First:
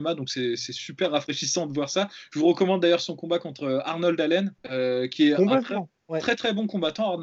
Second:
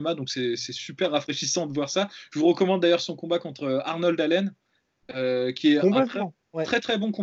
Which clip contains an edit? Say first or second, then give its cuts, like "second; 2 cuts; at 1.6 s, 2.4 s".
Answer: first; 1 cut; at 4.6 s